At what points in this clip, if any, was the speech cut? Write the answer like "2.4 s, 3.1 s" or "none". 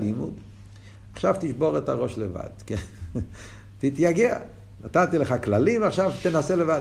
none